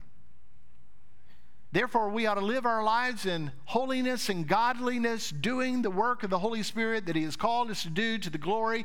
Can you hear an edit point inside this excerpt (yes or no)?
no